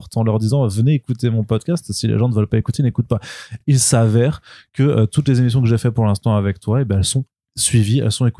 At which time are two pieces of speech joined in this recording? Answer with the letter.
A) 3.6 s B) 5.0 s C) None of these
C